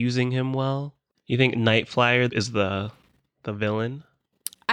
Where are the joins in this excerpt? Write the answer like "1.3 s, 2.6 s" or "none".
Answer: 1.1 s, 2.3 s